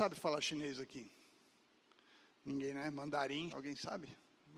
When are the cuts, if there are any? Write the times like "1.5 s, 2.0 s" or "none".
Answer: 3.5 s